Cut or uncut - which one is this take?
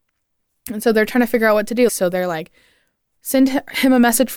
cut